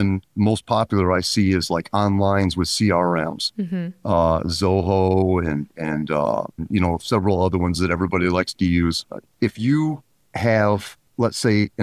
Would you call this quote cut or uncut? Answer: cut